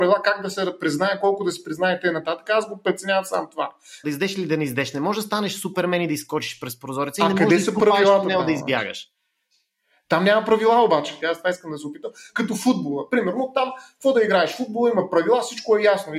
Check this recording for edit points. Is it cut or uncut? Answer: cut